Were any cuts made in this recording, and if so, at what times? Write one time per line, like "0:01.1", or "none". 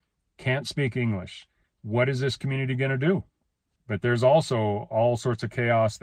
0:01.6
0:03.8